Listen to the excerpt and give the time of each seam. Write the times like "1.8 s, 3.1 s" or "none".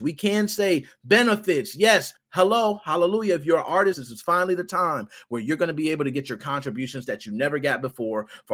2.2 s, 3.9 s